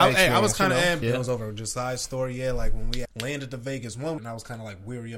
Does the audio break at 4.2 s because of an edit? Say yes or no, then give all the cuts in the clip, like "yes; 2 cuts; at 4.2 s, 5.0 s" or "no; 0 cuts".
yes; 3 cuts; at 1.0 s, 3.0 s, 4.2 s